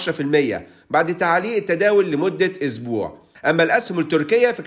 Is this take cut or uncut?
cut